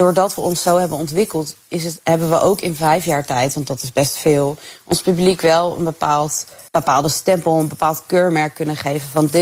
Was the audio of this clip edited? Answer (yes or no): yes